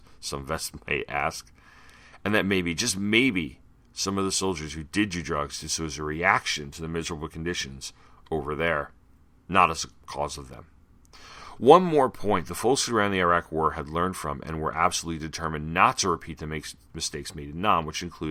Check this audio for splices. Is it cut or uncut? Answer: uncut